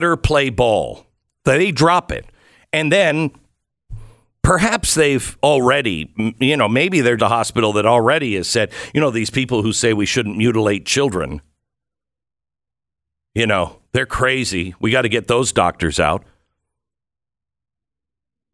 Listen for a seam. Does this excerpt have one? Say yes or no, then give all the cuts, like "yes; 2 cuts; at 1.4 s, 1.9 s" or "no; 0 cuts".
yes; 1 cut; at 7.2 s